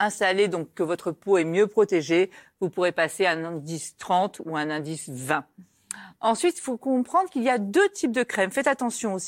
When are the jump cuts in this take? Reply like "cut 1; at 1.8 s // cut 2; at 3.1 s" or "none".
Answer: none

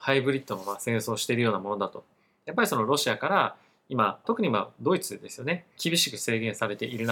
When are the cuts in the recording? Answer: cut 1; at 4.2 s // cut 2; at 5.8 s

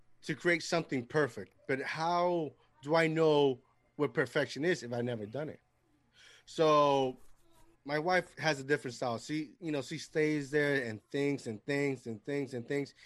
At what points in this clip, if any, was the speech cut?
cut 1; at 7.7 s

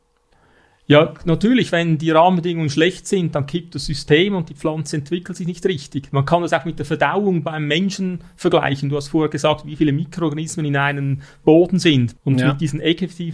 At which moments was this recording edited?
cut 1; at 12.2 s

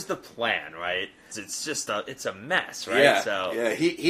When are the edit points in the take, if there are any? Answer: cut 1; at 1.3 s

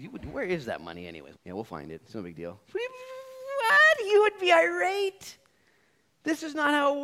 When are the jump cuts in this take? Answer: cut 1; at 1.3 s

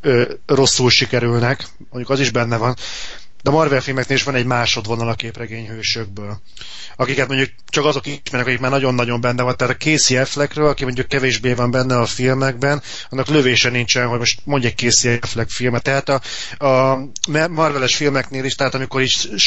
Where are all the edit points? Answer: cut 1; at 15.8 s

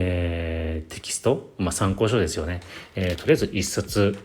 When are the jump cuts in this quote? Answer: none

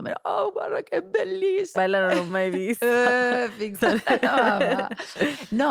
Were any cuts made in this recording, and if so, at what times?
cut 1; at 1.8 s // cut 2; at 3.7 s

